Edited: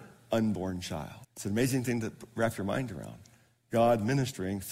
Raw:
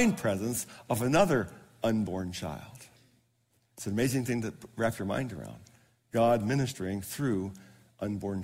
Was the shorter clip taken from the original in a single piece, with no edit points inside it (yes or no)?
no